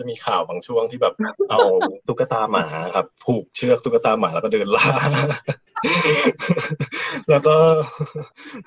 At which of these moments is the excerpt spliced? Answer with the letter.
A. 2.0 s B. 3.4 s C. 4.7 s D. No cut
A